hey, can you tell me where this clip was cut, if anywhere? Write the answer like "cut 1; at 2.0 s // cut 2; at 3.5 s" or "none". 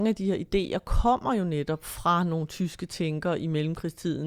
none